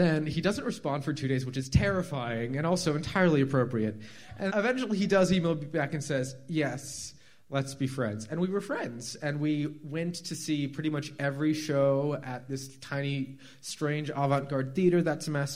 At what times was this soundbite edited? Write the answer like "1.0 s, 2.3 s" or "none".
4.5 s